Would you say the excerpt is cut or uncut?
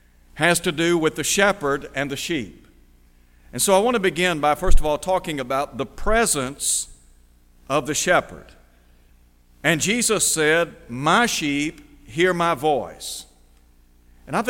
uncut